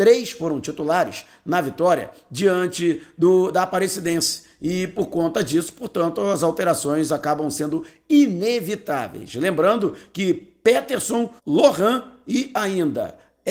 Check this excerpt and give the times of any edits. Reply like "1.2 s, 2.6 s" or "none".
11.4 s